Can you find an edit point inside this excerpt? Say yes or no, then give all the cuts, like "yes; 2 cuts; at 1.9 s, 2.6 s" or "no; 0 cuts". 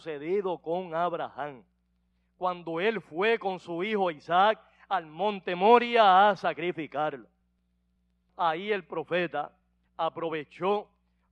yes; 1 cut; at 8.3 s